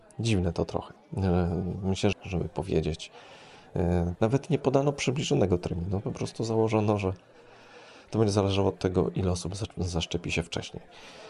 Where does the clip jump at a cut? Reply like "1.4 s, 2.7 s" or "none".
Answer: 2.1 s, 4.2 s